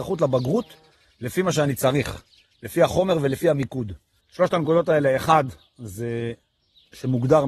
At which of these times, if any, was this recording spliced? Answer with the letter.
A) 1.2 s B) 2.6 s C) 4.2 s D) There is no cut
C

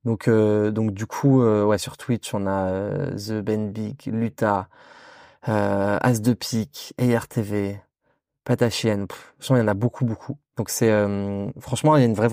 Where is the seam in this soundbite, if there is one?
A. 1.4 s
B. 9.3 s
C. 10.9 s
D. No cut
D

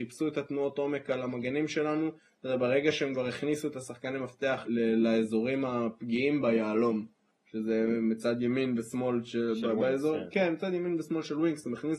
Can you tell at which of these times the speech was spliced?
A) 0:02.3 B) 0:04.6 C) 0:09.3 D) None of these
B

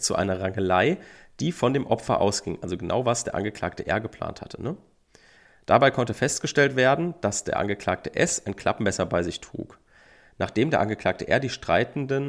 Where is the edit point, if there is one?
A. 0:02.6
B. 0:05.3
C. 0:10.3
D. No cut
D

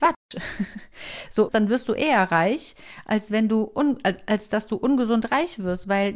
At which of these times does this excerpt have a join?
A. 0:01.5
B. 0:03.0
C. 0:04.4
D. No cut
A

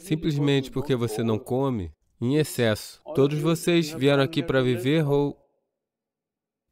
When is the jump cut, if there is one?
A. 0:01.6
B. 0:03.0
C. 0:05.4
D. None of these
B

